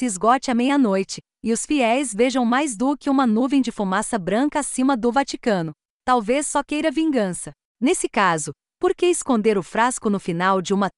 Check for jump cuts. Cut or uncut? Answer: cut